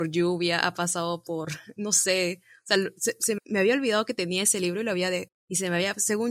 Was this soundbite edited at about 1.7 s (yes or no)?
no